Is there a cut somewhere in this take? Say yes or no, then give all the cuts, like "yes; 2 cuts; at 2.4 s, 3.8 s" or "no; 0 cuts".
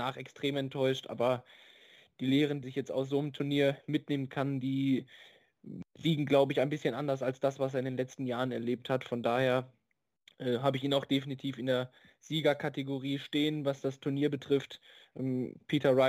yes; 1 cut; at 2.6 s